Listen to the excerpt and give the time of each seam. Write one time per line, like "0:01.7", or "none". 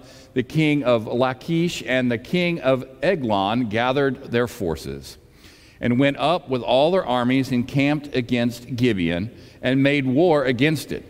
none